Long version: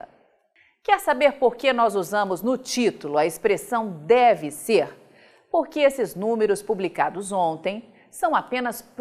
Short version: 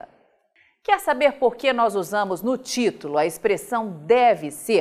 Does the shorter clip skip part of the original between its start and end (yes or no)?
no